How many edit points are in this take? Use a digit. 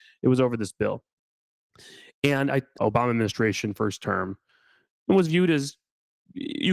1